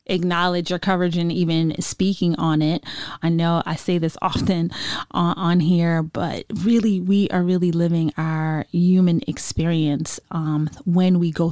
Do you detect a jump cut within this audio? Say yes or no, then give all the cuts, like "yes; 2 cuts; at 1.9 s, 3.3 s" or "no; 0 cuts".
yes; 1 cut; at 3.2 s